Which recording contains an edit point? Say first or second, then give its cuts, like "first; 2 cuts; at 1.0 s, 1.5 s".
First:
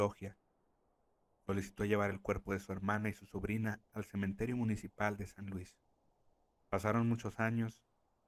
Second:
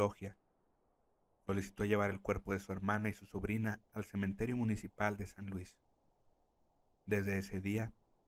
first; 1 cut; at 6.6 s